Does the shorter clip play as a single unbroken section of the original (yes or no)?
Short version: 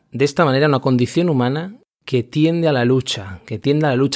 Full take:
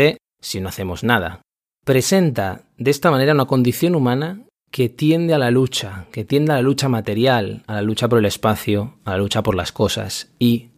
yes